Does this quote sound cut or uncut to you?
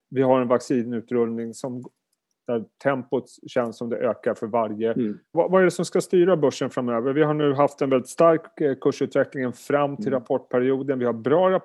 cut